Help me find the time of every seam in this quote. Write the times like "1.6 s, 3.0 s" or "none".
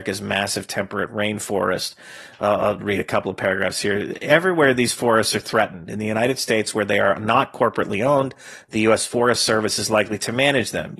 none